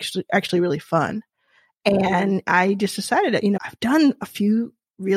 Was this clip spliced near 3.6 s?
yes; 1 cut; at 3.6 s

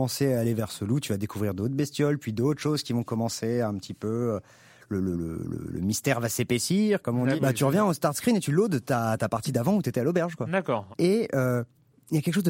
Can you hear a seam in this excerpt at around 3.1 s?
no; 3 cuts; at 5.1 s, 7.4 s, 10.9 s

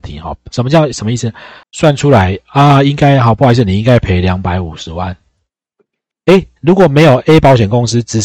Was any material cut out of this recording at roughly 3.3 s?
no; 2 cuts; at 1.6 s, 6.1 s

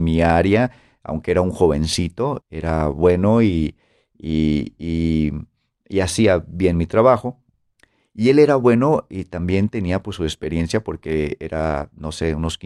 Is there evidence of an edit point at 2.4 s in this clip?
yes; 1 cut; at 2.4 s

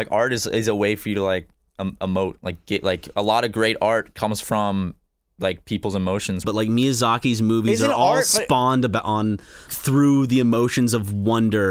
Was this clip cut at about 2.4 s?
no; 2 cuts; at 6.4 s, 9.7 s

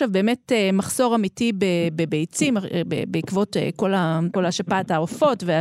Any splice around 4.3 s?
yes; 1 cut; at 4.3 s

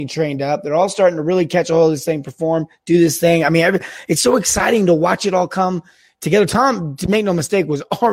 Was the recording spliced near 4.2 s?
yes; 1 cut; at 4.2 s

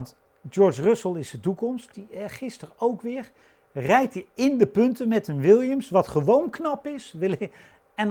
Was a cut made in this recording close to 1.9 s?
yes; 1 cut; at 1.9 s

